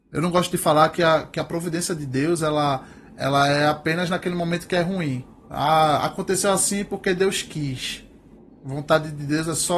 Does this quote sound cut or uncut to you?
uncut